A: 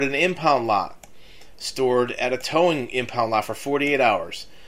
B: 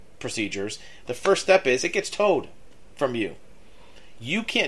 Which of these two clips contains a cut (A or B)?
B